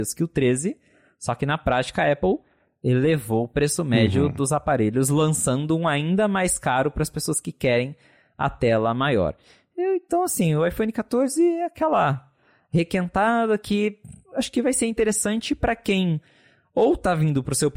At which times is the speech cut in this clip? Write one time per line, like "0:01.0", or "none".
none